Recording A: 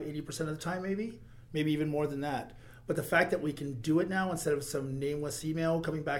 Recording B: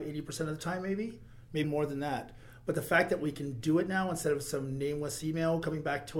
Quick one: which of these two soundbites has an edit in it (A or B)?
B